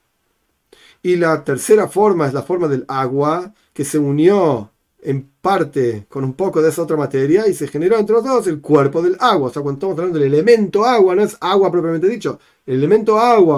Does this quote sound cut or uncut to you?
uncut